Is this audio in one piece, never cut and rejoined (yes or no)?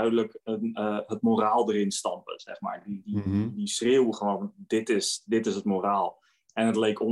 yes